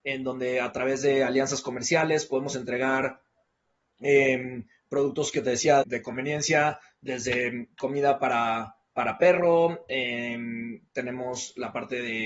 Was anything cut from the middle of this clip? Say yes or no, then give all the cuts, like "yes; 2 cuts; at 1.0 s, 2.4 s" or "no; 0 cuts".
yes; 1 cut; at 5.8 s